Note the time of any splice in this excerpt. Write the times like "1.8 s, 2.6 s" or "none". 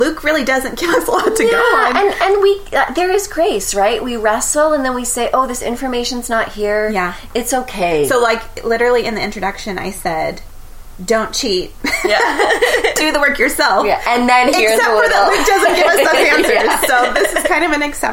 none